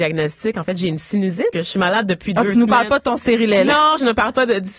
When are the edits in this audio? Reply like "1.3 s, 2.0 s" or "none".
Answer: 1.5 s

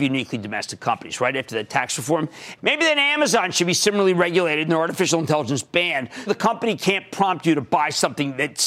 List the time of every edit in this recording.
2.6 s, 6.3 s

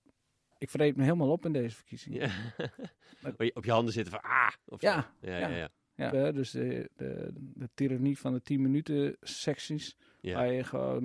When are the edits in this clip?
6.1 s, 7.3 s

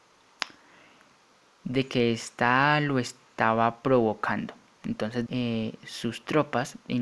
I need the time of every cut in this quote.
5.3 s

